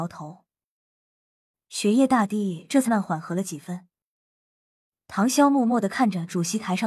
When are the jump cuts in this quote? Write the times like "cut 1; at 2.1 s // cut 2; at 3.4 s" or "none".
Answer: cut 1; at 2.9 s